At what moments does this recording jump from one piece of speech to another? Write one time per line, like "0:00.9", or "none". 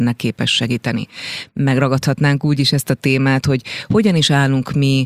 none